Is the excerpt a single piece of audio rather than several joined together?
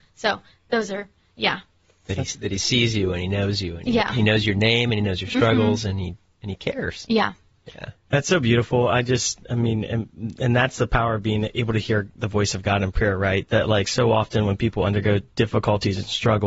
yes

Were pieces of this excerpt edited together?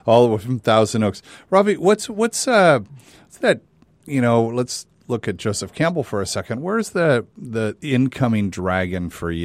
no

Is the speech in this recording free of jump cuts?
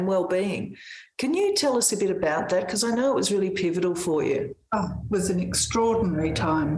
yes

